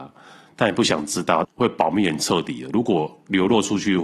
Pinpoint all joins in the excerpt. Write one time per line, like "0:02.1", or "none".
0:01.4